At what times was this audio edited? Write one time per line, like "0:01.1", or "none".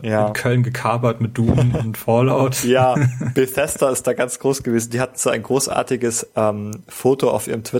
none